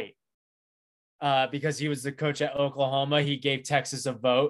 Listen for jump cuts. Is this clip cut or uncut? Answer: uncut